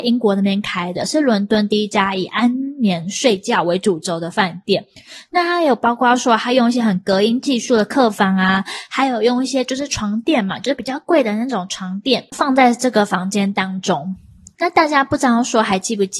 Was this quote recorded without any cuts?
yes; 0 cuts

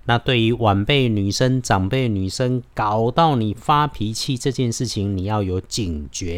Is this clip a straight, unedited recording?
yes; 0 cuts

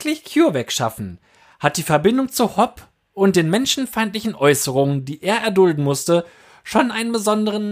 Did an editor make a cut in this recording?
no; 0 cuts

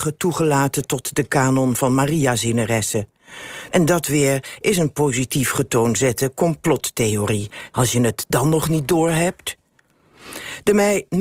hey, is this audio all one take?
no; 2 cuts; at 3.7 s, 7.7 s

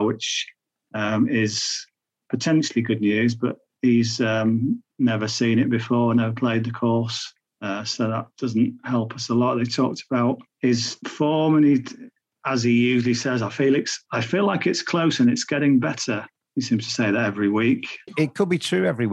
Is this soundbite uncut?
yes; 0 cuts

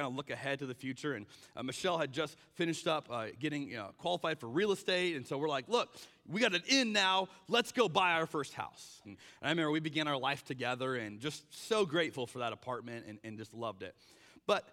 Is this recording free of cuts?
no; 1 cut; at 9.0 s

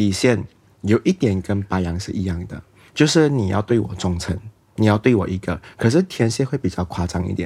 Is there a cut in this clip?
no; 0 cuts

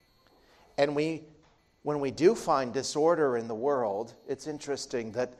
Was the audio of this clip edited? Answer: no; 0 cuts

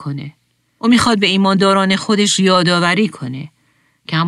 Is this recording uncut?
yes; 0 cuts

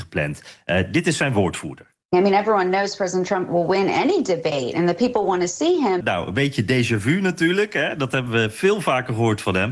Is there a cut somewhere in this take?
yes; 2 cuts; at 2.0 s, 6.0 s

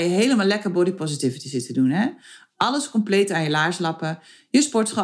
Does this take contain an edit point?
no; 0 cuts

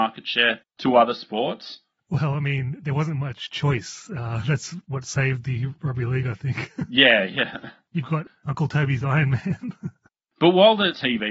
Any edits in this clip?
no; 0 cuts

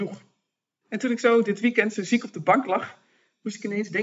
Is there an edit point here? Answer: no; 0 cuts

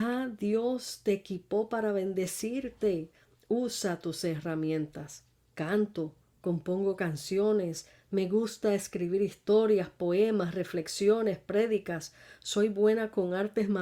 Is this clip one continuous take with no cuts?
no; 1 cut; at 5.5 s

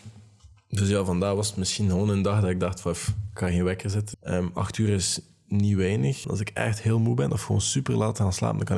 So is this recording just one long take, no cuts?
no; 2 cuts; at 4.1 s, 6.2 s

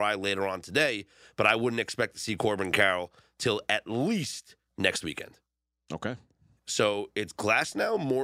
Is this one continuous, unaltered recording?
no; 1 cut; at 6.6 s

